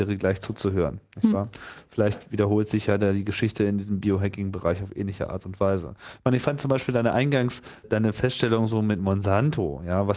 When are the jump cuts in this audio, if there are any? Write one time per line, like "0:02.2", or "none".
0:07.8